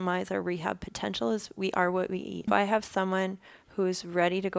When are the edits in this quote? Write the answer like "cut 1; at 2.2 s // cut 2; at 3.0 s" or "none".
cut 1; at 2.5 s